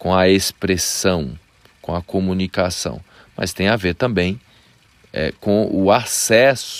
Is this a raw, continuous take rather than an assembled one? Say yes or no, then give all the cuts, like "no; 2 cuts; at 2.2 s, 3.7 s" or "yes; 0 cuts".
yes; 0 cuts